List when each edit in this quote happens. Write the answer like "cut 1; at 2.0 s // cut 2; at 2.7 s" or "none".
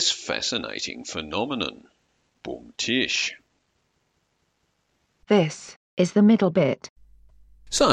none